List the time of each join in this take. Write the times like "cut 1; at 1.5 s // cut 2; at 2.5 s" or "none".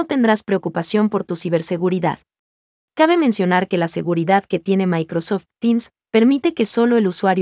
cut 1; at 2.8 s